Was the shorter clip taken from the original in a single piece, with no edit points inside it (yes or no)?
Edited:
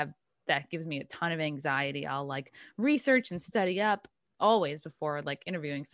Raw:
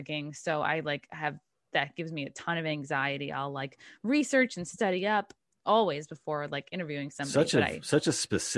yes